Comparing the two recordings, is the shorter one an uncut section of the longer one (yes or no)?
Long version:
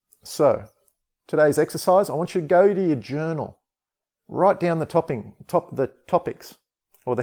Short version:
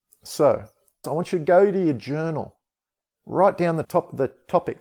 no